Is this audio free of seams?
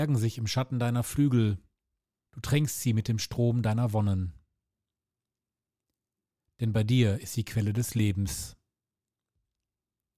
no; 1 cut; at 2.3 s

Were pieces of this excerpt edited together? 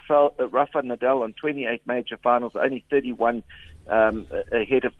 no; 0 cuts

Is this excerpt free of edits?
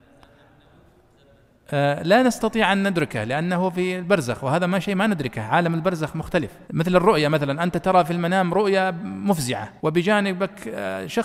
no; 2 cuts; at 6.7 s, 9.8 s

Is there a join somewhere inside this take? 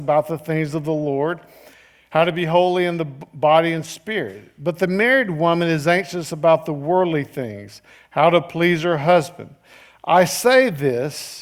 no; 0 cuts

